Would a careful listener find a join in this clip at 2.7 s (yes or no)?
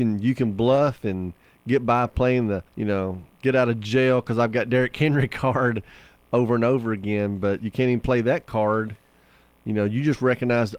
yes